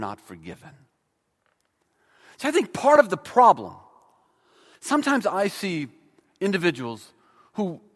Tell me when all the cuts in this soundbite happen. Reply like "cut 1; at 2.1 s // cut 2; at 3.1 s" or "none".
cut 1; at 4.7 s